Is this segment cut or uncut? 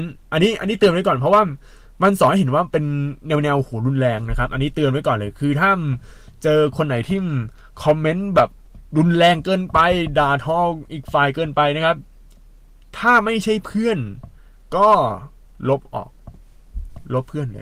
uncut